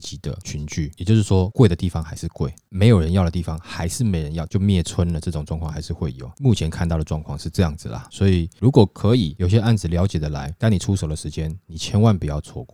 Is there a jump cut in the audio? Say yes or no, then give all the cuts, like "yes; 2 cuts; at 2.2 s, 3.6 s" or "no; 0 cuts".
yes; 2 cuts; at 4.5 s, 9.4 s